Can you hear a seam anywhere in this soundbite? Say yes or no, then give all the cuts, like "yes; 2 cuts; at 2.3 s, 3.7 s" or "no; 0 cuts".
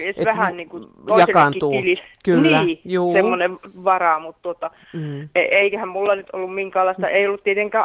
no; 0 cuts